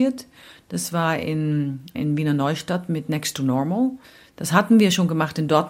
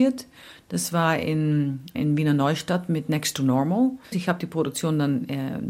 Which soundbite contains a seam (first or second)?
second